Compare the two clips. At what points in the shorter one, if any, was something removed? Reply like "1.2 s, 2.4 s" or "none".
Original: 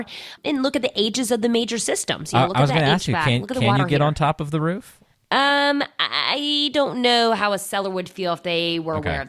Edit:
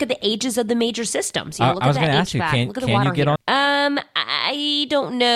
3.4 s